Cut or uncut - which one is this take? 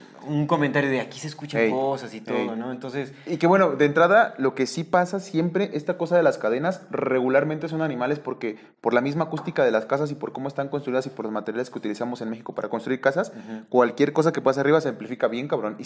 uncut